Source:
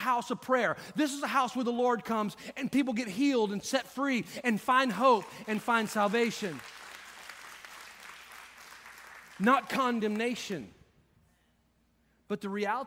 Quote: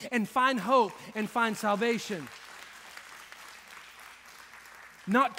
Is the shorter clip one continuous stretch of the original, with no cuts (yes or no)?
yes